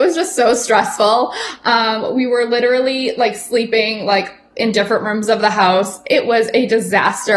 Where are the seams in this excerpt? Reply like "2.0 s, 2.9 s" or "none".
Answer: none